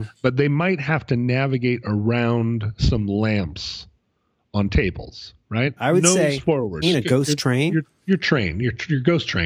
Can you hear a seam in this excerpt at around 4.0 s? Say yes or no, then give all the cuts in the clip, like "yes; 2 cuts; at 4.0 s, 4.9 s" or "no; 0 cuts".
no; 2 cuts; at 5.8 s, 6.8 s